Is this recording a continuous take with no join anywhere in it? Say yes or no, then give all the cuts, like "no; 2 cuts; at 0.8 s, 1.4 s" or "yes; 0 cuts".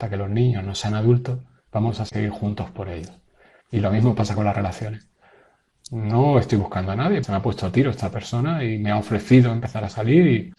no; 2 cuts; at 3.6 s, 7.2 s